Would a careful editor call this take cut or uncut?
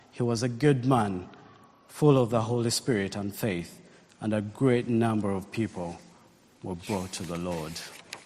uncut